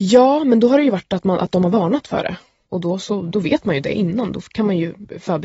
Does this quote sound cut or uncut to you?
uncut